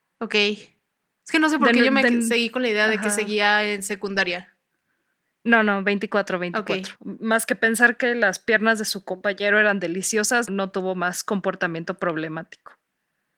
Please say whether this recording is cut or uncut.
cut